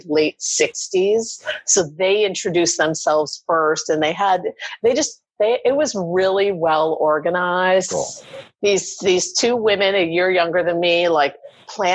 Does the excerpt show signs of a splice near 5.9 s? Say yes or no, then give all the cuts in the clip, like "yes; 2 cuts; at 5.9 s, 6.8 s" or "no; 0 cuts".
no; 1 cut; at 7.9 s